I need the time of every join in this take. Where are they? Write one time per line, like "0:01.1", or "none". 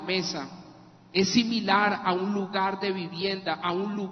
none